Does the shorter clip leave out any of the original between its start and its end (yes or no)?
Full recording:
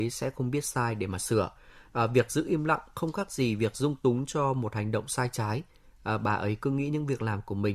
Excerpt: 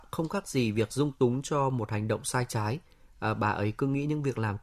no